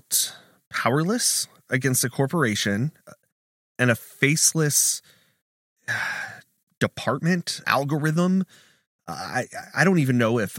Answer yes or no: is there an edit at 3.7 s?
no